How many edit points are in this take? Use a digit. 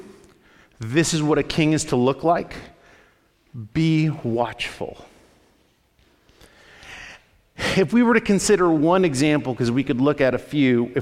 0